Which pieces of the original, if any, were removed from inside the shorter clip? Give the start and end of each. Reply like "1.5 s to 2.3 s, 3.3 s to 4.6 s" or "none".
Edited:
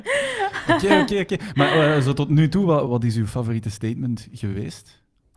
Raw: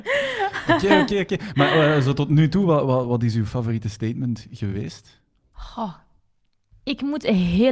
2.9 s to 3.0 s